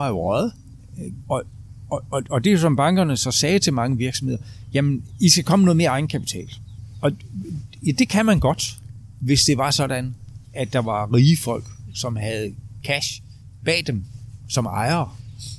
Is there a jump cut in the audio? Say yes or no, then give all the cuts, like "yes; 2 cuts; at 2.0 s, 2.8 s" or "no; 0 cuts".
yes; 2 cuts; at 1.2 s, 10.4 s